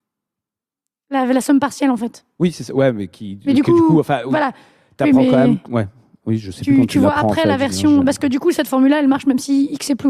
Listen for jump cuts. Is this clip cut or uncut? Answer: uncut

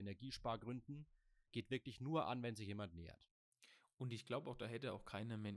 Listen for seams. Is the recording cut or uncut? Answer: uncut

